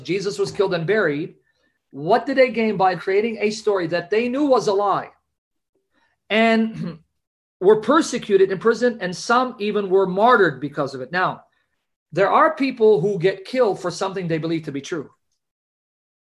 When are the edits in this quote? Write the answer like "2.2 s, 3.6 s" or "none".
3.0 s